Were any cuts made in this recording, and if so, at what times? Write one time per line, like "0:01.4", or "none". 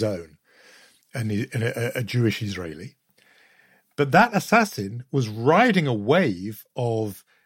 none